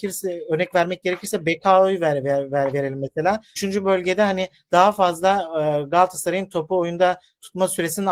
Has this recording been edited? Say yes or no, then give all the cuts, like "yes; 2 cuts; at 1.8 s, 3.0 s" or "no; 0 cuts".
yes; 1 cut; at 3.6 s